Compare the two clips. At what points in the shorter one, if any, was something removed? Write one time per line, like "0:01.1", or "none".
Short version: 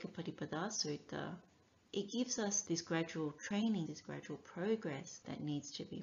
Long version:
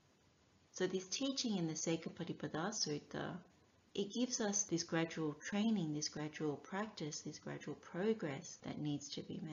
0:03.9

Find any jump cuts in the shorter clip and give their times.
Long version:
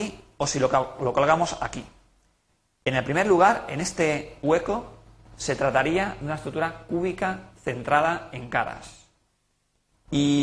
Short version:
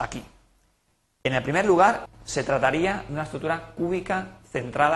0:02.1

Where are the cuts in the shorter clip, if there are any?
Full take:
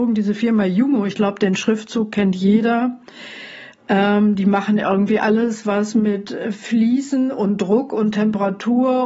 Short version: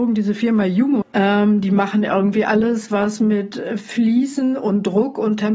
0:01.0

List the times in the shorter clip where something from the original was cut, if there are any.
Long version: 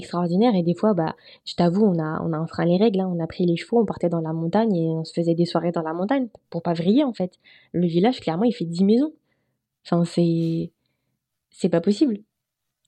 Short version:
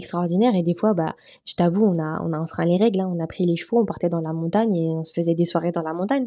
none

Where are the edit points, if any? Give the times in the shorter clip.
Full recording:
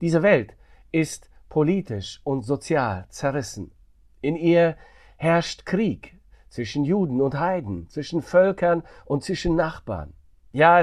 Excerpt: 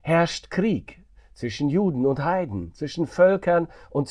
none

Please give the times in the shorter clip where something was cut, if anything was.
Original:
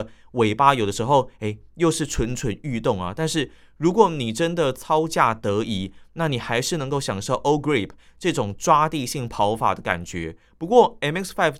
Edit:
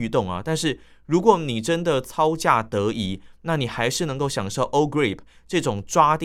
none

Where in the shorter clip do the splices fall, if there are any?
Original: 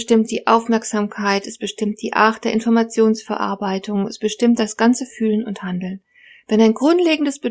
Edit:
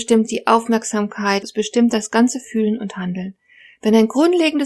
0:01.4

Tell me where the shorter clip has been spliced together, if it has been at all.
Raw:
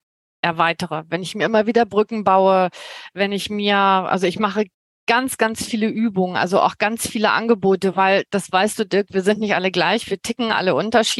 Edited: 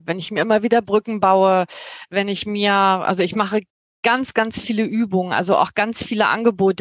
none

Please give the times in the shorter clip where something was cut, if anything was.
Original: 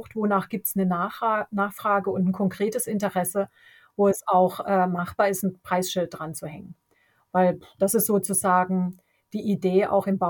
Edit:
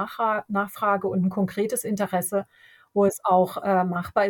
none

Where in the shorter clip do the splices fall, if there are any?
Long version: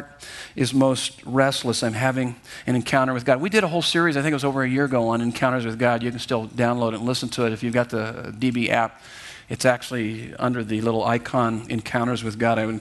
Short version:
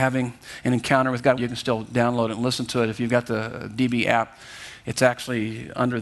0:01.4

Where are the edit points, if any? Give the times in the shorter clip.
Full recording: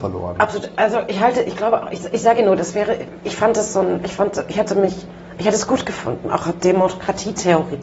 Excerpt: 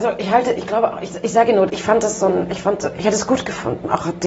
0:01.7
0:02.9

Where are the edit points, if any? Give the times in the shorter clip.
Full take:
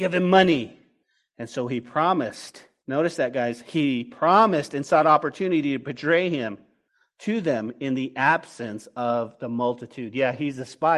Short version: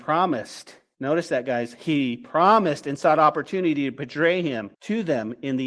0:04.7

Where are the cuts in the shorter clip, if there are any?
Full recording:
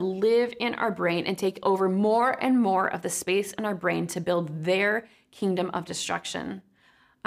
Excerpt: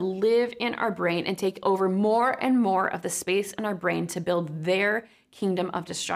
none

